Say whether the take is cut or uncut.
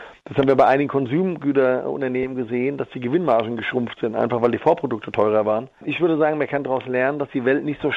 uncut